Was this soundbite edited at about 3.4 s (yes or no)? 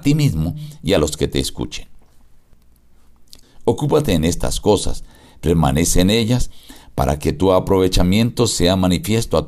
yes